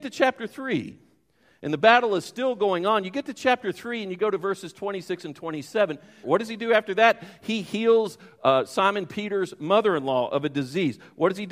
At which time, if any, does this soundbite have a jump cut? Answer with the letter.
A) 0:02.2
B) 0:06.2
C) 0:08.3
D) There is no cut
B